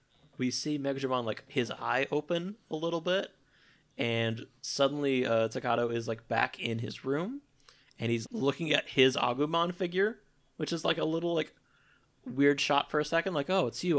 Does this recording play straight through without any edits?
no; 1 cut; at 8.2 s

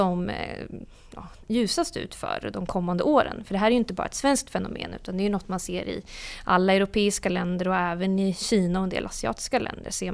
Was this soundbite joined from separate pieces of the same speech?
yes; 1 cut; at 1.4 s

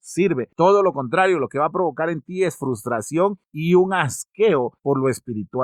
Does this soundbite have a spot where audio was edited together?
no; 0 cuts

